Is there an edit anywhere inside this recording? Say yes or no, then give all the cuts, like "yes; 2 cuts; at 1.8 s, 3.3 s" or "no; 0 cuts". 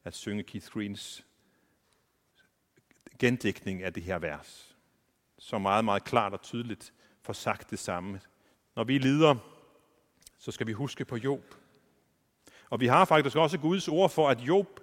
yes; 1 cut; at 8.7 s